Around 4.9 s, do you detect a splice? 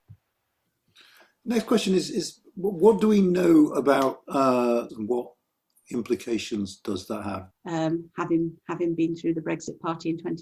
yes; 2 cuts; at 4.9 s, 7.5 s

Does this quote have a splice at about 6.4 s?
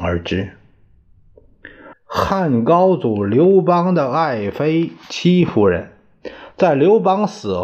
no; 2 cuts; at 1.9 s, 5.0 s

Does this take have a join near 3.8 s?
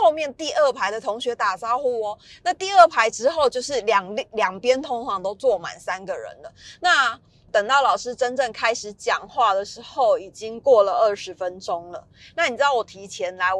no; 1 cut; at 7.5 s

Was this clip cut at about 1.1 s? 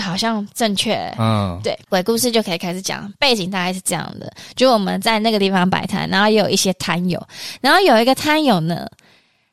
no; 0 cuts

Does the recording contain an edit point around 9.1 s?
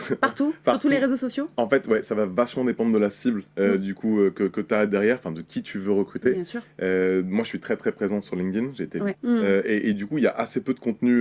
yes; 1 cut; at 9.1 s

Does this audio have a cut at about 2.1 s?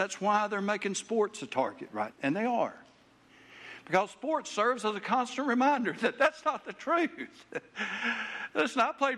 yes; 1 cut; at 2.1 s

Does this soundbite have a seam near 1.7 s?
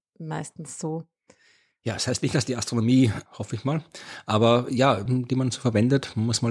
no; 2 cuts; at 3.3 s, 5.1 s

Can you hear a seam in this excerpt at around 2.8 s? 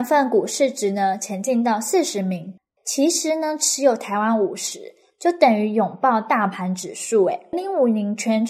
yes; 2 cuts; at 2.8 s, 7.5 s

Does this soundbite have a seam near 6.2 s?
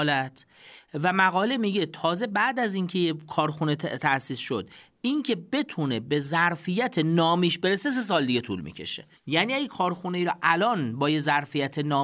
no; 1 cut; at 9.2 s

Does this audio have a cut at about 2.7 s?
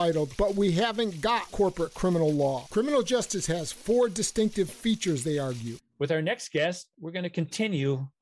no; 1 cut; at 5.8 s

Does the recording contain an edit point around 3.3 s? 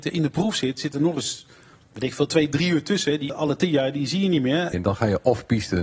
yes; 2 cuts; at 3.3 s, 4.7 s

